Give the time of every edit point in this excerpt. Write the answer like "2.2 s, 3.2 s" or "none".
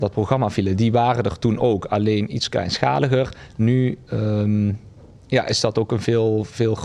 none

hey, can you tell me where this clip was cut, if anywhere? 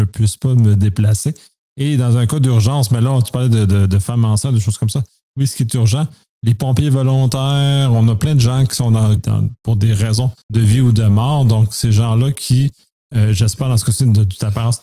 9.2 s, 10.4 s

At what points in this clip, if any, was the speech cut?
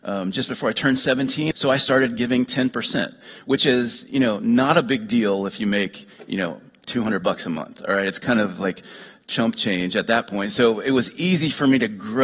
1.5 s

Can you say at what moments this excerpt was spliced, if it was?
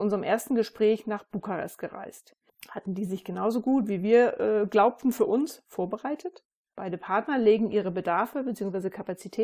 2.5 s, 6.7 s

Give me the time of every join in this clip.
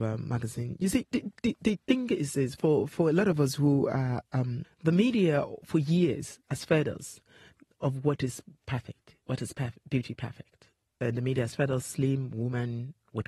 4.6 s

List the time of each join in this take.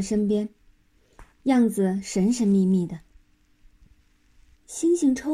none

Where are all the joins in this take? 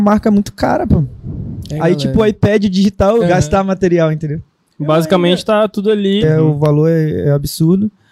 3.2 s, 6.2 s

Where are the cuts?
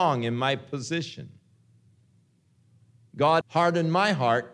3.4 s

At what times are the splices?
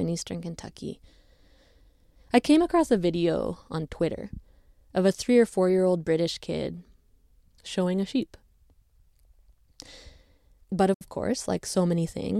10.6 s

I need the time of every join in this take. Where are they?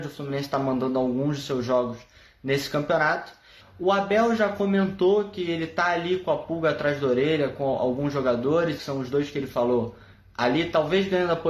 3.6 s, 8.8 s

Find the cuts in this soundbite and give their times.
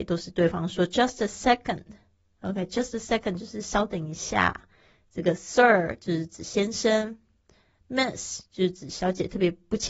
none

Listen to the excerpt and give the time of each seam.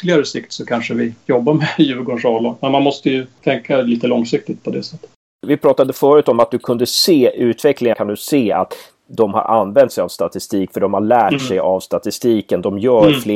7.9 s

